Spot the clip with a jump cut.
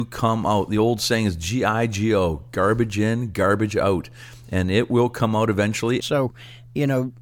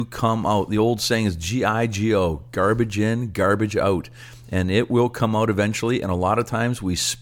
first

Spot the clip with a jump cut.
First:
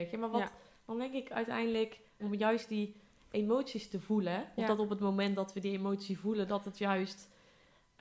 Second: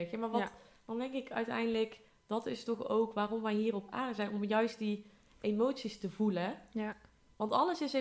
first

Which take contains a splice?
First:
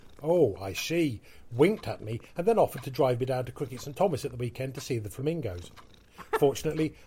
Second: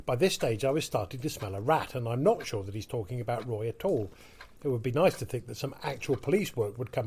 second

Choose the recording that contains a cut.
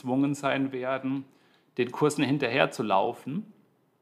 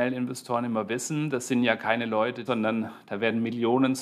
second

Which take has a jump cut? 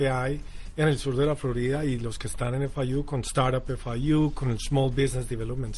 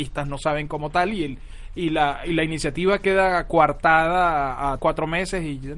second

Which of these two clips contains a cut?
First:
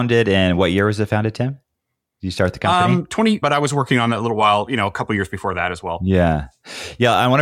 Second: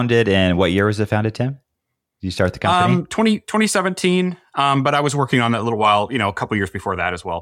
first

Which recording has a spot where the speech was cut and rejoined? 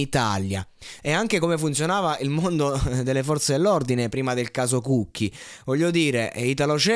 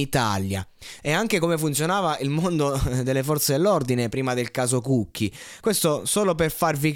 second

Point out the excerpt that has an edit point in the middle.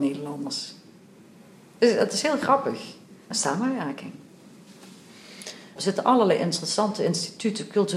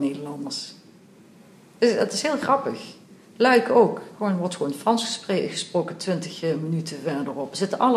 first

